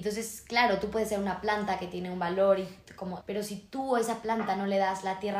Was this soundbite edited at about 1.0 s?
no; 1 cut; at 3.2 s

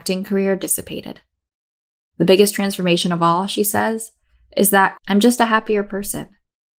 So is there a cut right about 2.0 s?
no; 1 cut; at 5.0 s

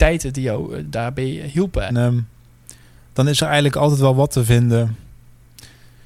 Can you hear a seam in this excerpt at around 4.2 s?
no; 1 cut; at 1.9 s

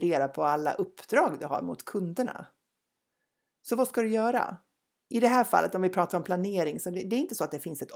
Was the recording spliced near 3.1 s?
no; 1 cut; at 5.1 s

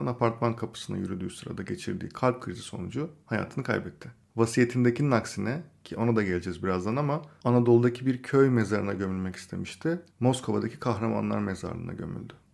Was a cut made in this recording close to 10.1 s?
no; 0 cuts

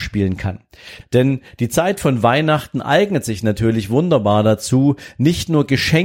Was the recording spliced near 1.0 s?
yes; 1 cut; at 1.0 s

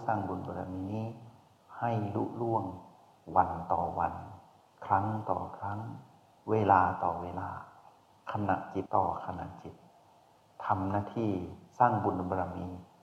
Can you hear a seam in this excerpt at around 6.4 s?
no; 1 cut; at 8.9 s

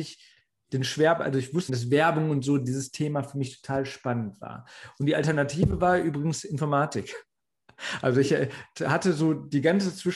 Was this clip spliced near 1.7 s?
yes; 1 cut; at 1.7 s

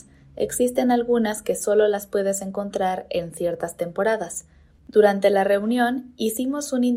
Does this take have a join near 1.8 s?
no; 1 cut; at 4.8 s

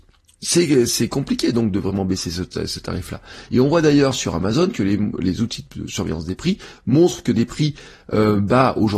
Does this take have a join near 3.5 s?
no; 0 cuts

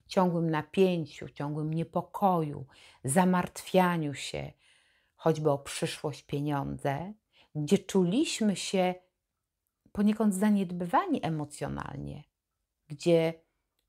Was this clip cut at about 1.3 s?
no; 0 cuts

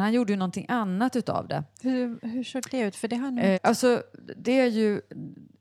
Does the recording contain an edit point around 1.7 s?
no; 1 cut; at 3.5 s

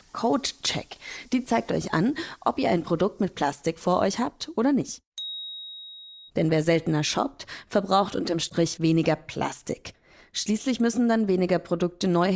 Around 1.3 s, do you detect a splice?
no; 1 cut; at 6.3 s

